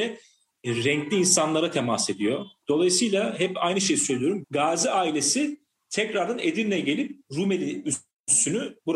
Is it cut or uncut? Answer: cut